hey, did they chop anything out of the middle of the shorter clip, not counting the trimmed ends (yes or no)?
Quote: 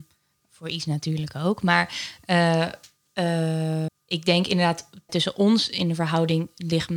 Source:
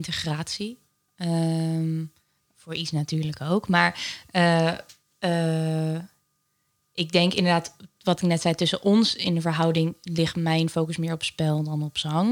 yes